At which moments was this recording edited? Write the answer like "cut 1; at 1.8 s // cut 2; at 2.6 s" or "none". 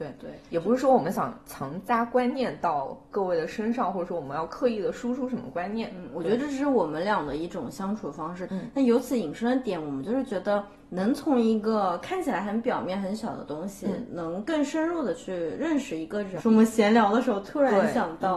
cut 1; at 8.5 s // cut 2; at 16.4 s